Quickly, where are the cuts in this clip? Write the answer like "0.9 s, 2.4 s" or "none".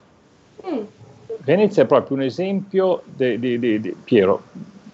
4.0 s